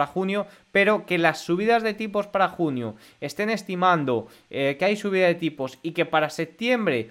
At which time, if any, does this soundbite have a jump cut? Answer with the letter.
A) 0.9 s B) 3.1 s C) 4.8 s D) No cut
D